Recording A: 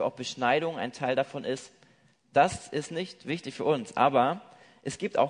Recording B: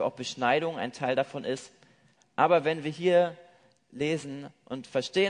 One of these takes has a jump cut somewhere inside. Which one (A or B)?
B